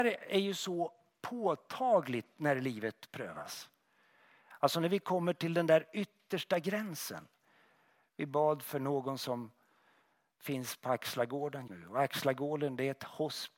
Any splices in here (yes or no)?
yes